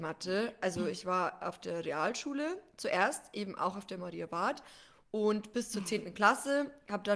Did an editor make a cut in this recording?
no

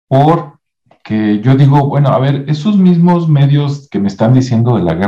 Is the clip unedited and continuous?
yes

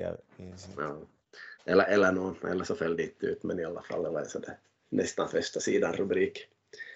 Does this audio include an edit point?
no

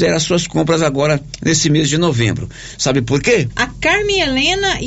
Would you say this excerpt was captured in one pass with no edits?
no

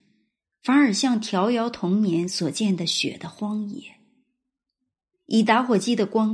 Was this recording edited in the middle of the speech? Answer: yes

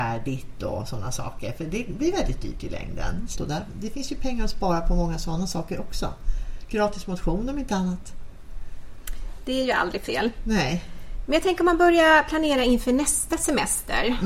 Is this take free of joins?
no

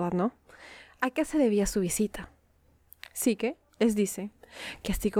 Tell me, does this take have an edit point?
no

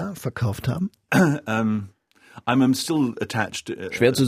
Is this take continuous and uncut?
no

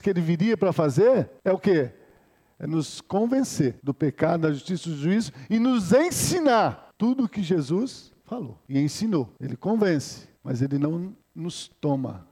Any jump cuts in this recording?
yes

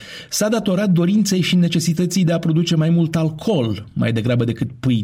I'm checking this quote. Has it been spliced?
no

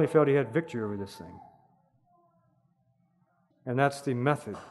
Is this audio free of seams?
no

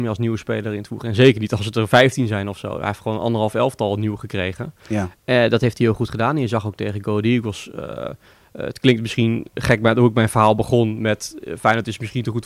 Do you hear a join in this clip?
no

